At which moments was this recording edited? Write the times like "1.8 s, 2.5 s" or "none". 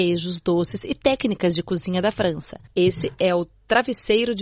2.7 s